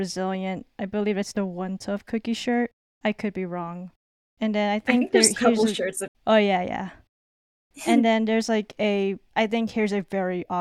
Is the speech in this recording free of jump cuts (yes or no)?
no